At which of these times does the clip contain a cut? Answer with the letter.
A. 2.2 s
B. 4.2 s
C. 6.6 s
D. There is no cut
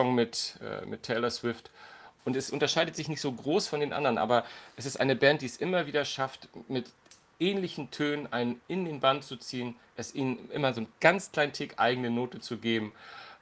A